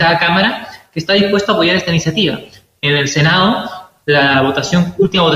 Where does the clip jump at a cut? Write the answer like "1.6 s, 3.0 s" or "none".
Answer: none